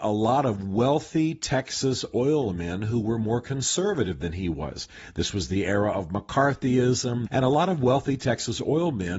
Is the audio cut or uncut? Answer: cut